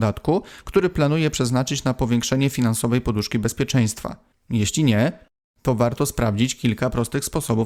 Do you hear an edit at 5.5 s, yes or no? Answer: no